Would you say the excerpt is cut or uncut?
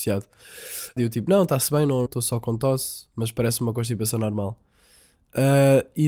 cut